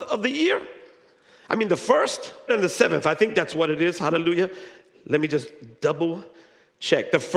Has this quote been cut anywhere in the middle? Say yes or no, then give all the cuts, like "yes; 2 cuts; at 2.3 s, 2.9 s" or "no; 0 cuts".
yes; 1 cut; at 2.5 s